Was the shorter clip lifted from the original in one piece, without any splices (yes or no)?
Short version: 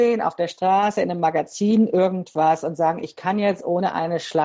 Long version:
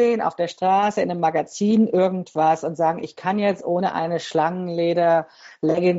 yes